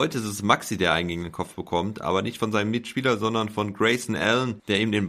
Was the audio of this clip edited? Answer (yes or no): no